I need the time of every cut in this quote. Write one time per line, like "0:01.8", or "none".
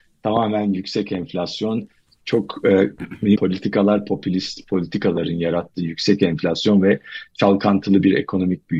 0:03.4